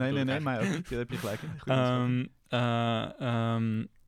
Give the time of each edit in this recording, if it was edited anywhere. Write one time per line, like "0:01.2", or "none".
none